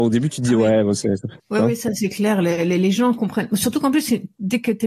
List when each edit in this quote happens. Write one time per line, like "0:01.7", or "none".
0:01.4